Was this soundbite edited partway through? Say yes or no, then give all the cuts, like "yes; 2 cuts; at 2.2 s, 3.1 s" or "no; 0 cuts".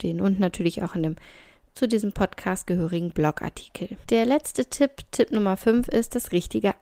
yes; 1 cut; at 4.0 s